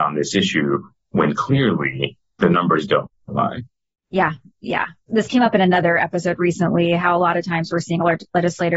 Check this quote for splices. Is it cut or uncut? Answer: uncut